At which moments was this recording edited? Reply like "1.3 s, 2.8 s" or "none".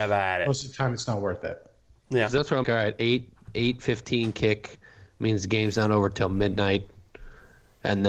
2.6 s